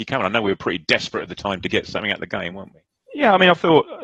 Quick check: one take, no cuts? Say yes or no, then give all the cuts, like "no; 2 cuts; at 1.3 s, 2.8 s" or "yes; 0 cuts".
yes; 0 cuts